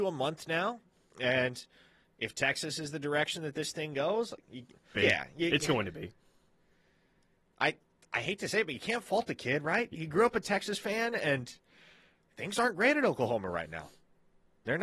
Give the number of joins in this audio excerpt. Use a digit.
1